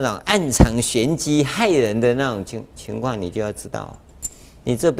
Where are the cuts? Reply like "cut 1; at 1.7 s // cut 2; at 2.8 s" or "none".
none